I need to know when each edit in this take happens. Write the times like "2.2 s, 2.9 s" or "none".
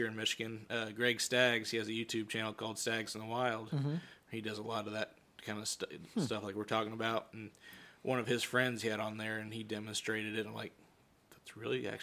none